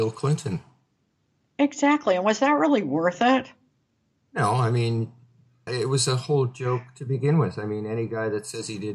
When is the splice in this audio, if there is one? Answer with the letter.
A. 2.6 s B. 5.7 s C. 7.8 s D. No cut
B